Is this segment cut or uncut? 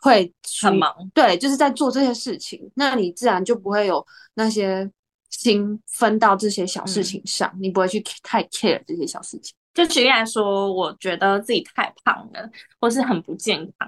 cut